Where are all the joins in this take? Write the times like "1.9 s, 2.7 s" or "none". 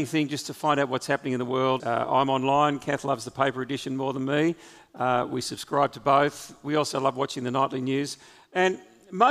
1.8 s

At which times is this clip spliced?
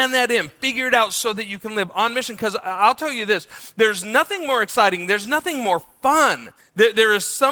6.6 s

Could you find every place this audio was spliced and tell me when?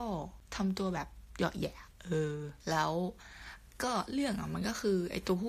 none

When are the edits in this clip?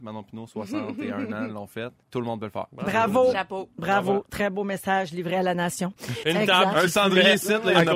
2.0 s, 6.2 s

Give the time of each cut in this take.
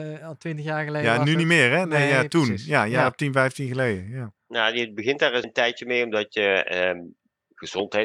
4.4 s, 5.4 s

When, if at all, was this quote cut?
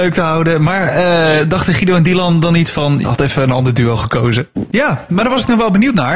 3.0 s, 4.7 s

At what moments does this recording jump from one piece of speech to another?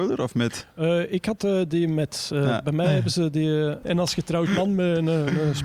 3.8 s

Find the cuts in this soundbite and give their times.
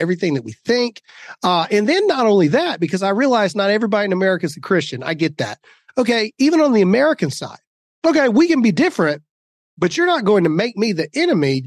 none

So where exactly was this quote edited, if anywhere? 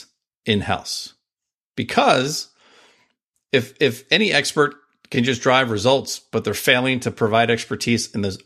none

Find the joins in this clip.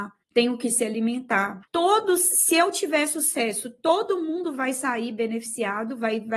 1.7 s

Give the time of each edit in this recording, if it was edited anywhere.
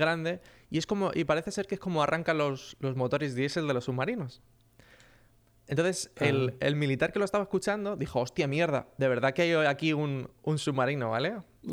none

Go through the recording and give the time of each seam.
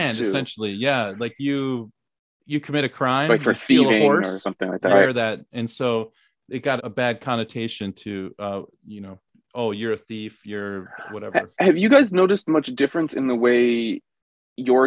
4.9 s, 6.8 s

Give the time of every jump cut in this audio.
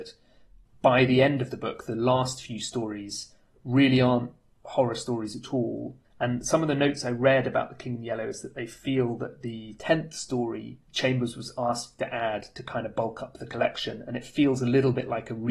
6.0 s, 10.8 s

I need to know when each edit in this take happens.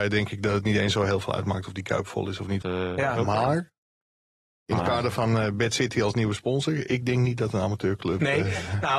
2.6 s

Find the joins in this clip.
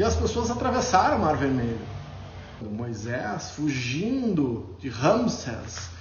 2.6 s

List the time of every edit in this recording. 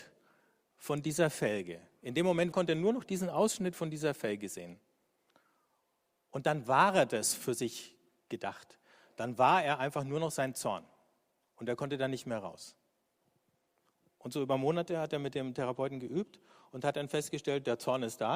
2.5 s

